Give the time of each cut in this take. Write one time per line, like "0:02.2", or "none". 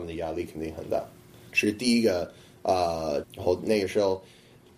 0:01.5
0:03.2